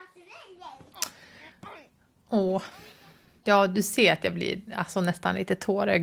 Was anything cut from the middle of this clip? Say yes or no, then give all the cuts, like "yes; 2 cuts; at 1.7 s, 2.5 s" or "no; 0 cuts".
no; 0 cuts